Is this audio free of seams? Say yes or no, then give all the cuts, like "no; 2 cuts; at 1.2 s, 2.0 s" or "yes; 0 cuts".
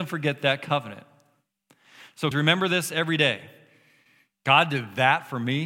no; 1 cut; at 2.3 s